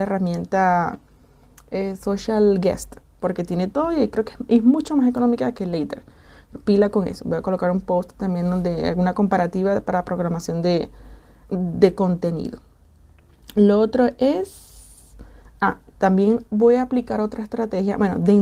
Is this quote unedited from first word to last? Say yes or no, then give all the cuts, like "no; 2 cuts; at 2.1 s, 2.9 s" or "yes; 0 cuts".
no; 1 cut; at 11.4 s